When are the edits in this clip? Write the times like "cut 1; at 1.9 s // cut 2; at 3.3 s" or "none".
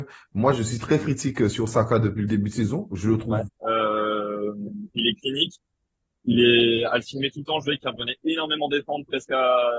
cut 1; at 3.5 s